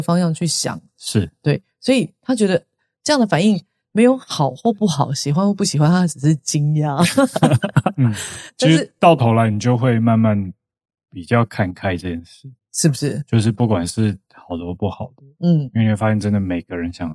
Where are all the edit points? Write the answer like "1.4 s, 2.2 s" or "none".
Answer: none